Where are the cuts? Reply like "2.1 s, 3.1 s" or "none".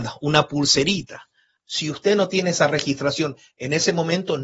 1.6 s

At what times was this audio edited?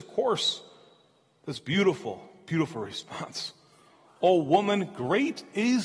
none

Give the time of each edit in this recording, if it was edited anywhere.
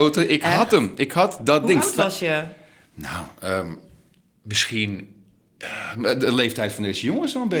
none

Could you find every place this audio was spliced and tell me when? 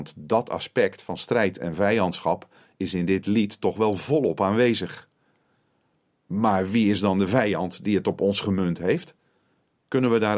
none

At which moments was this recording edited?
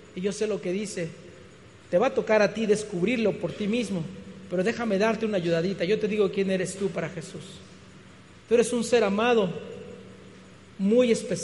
none

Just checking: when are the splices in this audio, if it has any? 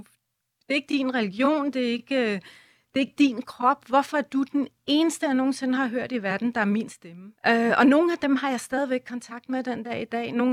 7.4 s

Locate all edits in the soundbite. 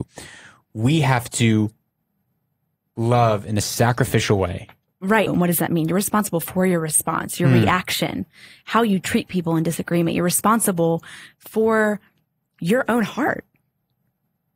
5.3 s

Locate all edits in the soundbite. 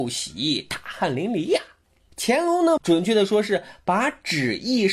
2.8 s

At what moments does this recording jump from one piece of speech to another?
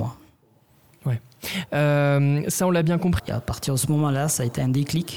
1.7 s, 3.2 s

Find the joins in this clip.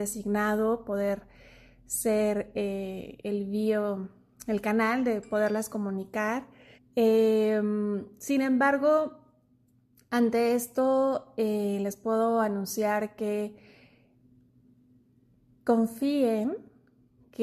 6.7 s

